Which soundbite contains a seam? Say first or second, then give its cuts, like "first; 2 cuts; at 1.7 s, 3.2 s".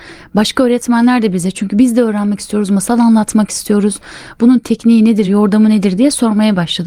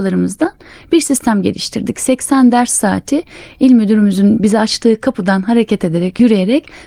first; 1 cut; at 5.2 s